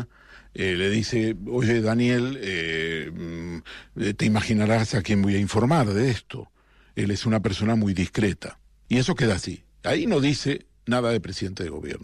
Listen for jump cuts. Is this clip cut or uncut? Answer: cut